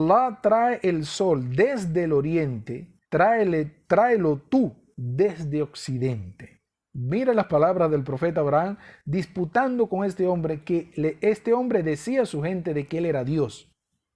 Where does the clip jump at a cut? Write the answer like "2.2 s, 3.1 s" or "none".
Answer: 3.0 s